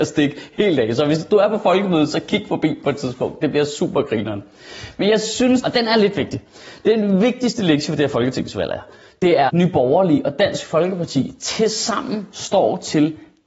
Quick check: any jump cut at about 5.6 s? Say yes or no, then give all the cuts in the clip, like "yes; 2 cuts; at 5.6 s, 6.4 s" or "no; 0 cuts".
yes; 2 cuts; at 5.6 s, 9.5 s